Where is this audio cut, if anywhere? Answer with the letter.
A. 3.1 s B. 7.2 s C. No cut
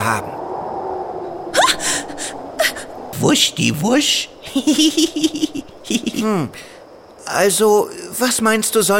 A